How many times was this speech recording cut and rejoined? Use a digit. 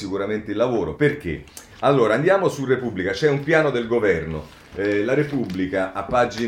0